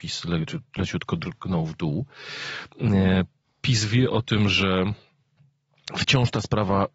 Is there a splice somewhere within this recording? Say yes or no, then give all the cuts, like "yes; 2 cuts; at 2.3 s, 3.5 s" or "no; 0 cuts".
no; 0 cuts